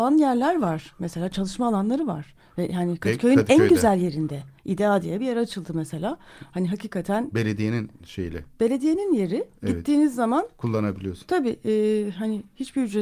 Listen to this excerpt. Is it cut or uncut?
uncut